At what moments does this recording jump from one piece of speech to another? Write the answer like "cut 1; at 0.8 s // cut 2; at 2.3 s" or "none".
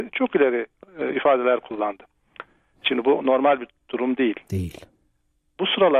none